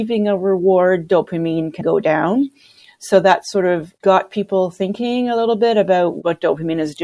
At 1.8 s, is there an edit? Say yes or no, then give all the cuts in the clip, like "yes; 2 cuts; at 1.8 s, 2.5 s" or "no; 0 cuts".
yes; 1 cut; at 1.8 s